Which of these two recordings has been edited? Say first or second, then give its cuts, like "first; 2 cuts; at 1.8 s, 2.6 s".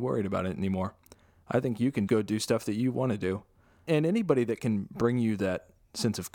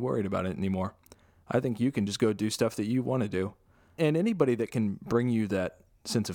first; 1 cut; at 2.1 s